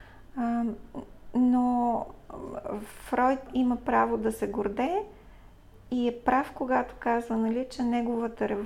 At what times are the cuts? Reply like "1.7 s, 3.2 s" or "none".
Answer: 3.5 s